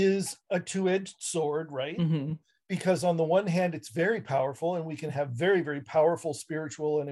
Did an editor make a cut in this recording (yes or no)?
no